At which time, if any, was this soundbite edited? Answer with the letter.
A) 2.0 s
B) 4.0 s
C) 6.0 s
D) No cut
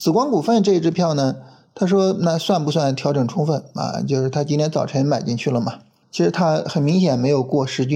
C